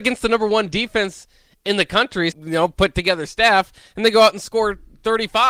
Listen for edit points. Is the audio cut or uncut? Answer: cut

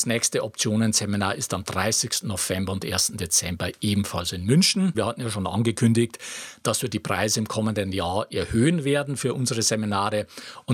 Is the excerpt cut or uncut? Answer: cut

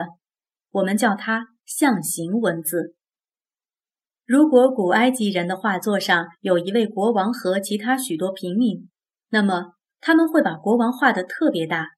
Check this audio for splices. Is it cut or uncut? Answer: uncut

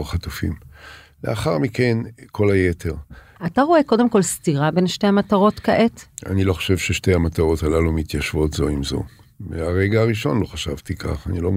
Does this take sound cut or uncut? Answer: cut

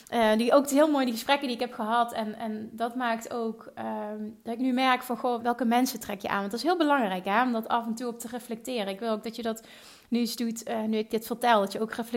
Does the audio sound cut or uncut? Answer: cut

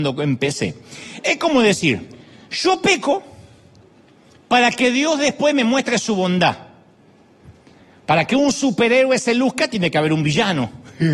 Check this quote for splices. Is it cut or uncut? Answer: uncut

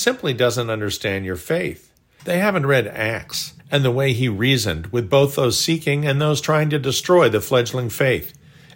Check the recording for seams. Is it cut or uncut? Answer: cut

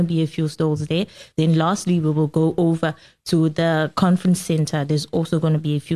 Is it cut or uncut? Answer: uncut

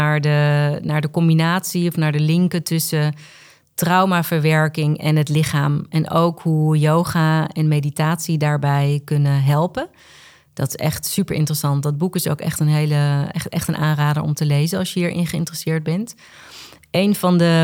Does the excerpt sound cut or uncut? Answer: uncut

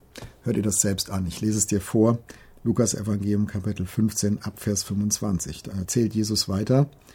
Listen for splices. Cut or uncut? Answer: uncut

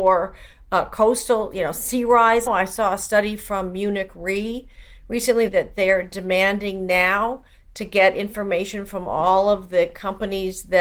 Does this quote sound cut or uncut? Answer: cut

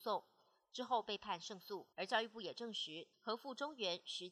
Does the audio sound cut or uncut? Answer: cut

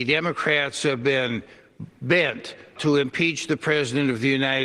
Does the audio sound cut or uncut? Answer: cut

